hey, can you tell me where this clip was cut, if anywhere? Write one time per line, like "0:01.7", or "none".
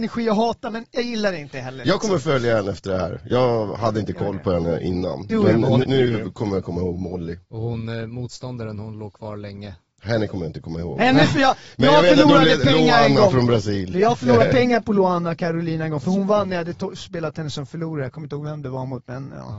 0:05.8
0:07.4